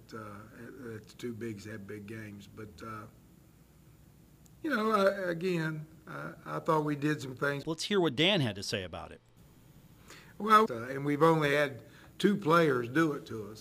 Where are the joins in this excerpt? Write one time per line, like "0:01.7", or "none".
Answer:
0:07.6
0:10.7